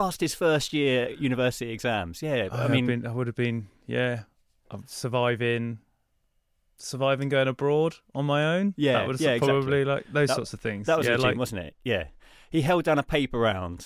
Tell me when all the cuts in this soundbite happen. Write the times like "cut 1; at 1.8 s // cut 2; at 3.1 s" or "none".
none

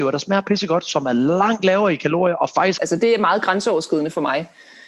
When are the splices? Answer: cut 1; at 2.8 s

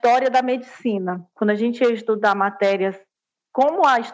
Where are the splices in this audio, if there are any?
none

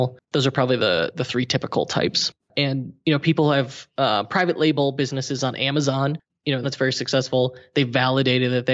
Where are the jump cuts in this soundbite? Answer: cut 1; at 2.5 s // cut 2; at 6.6 s

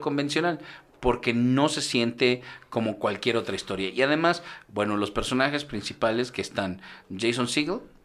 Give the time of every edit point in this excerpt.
none

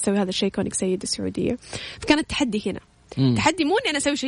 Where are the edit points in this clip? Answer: none

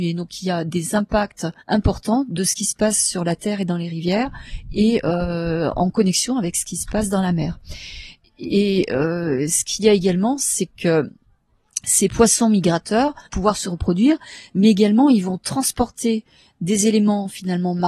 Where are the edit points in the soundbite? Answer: cut 1; at 1.6 s // cut 2; at 13.3 s

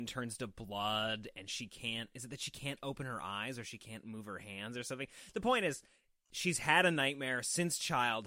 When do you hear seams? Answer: none

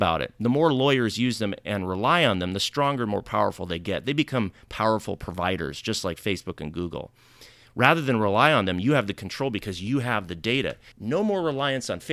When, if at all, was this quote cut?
cut 1; at 10.9 s

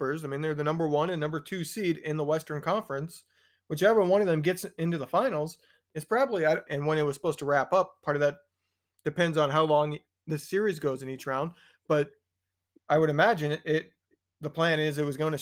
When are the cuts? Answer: cut 1; at 6.7 s

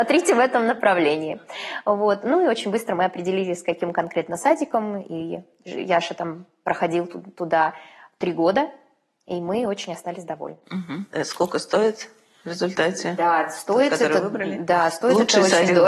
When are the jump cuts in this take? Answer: none

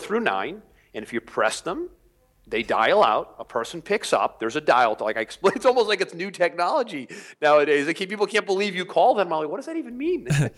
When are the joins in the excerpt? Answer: none

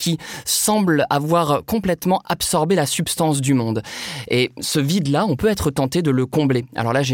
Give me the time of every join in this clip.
none

